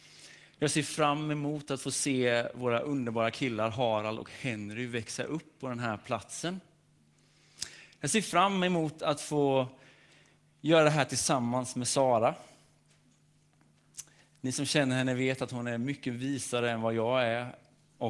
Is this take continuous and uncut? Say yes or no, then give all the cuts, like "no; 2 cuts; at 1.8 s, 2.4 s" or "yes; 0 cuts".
yes; 0 cuts